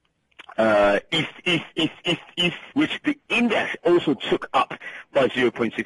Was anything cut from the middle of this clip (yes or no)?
yes